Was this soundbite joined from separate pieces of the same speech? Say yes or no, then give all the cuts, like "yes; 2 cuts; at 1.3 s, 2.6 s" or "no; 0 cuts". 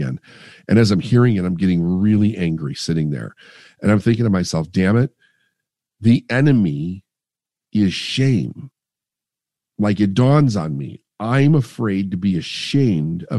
no; 0 cuts